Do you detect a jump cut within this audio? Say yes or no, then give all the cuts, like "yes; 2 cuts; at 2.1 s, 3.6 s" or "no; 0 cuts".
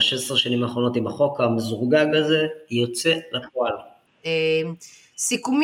yes; 1 cut; at 4.1 s